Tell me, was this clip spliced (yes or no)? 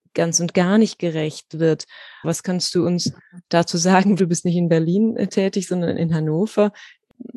yes